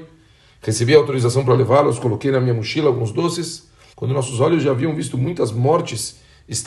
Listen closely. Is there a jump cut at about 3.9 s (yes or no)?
yes